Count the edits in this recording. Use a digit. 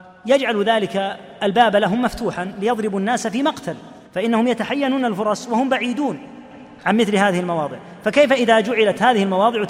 1